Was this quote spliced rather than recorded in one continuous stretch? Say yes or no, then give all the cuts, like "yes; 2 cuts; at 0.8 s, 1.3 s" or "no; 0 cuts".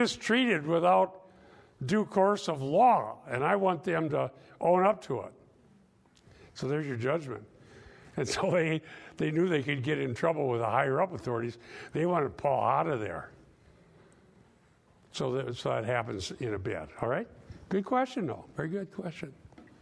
no; 0 cuts